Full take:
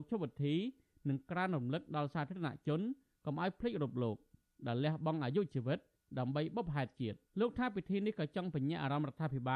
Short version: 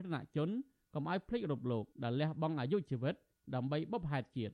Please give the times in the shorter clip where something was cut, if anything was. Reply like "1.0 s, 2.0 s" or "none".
1.9 s